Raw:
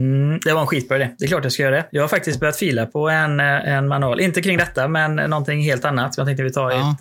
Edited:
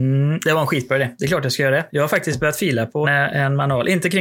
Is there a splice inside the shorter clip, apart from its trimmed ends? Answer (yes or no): yes